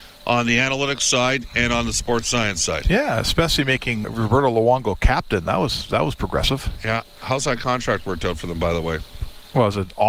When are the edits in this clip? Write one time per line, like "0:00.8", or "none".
0:04.0

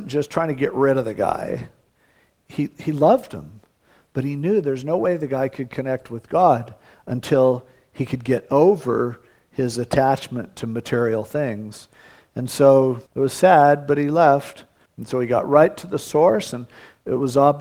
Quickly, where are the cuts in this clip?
0:13.1
0:14.8

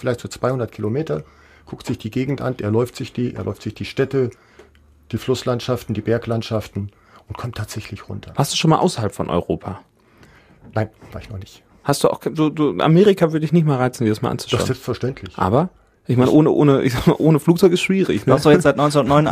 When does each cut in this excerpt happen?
none

